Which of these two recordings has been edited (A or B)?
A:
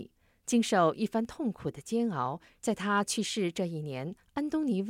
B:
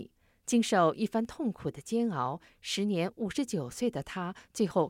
A